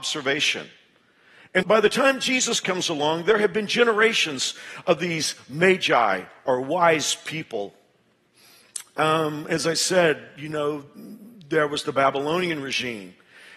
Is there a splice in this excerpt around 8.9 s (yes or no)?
no